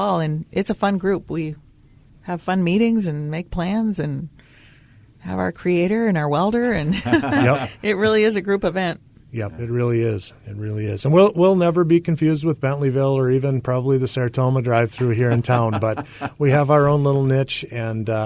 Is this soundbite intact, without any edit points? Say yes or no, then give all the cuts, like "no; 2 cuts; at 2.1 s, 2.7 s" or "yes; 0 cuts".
yes; 0 cuts